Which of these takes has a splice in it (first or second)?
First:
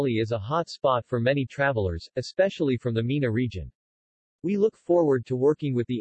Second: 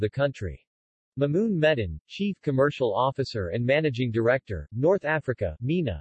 second